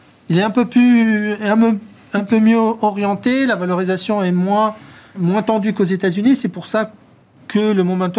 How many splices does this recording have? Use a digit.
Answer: 1